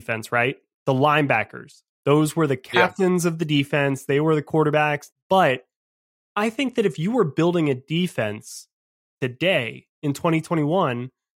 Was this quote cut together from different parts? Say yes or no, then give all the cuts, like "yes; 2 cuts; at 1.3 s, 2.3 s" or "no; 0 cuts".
yes; 1 cut; at 5.1 s